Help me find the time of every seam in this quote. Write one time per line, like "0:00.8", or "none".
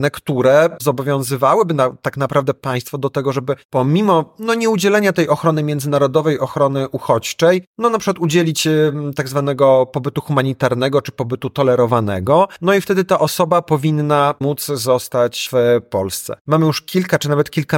0:16.4